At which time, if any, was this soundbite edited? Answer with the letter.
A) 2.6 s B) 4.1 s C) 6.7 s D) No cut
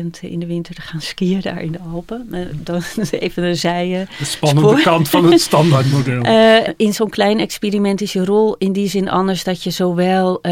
C